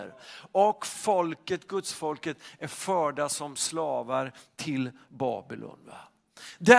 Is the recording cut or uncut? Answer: uncut